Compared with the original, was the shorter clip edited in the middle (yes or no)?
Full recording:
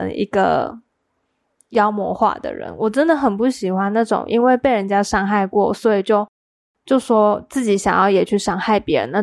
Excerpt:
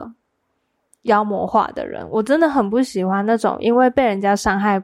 no